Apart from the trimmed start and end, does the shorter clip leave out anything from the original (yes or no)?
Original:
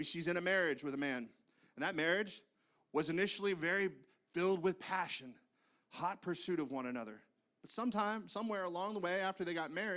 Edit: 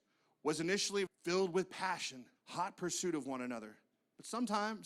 yes